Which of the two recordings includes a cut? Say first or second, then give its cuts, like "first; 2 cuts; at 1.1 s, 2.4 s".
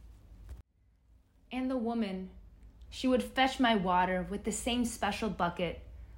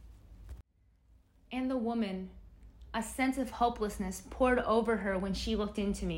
first; 1 cut; at 2.9 s